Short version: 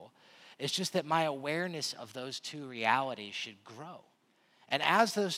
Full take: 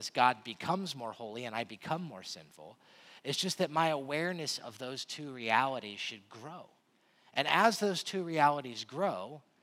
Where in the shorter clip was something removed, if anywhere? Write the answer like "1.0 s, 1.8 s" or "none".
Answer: none